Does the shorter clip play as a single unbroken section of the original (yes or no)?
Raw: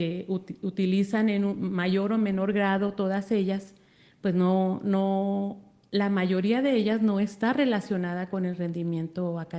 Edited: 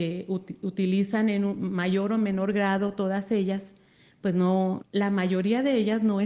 no